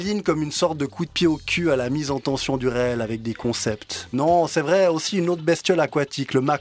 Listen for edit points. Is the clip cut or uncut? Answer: cut